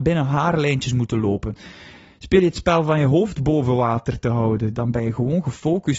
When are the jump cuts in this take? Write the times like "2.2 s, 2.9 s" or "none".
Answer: 4.7 s